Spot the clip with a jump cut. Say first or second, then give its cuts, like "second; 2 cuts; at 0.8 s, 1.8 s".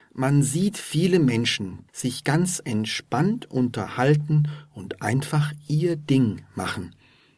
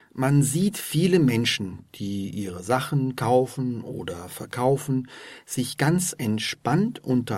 first; 1 cut; at 1.9 s